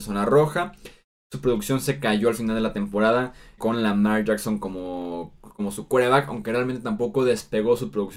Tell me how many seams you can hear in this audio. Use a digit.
1